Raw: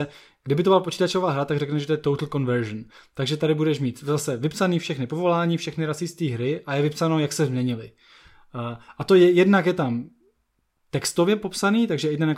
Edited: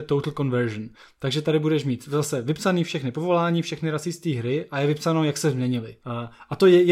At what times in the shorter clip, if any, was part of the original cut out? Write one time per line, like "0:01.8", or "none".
0:06.0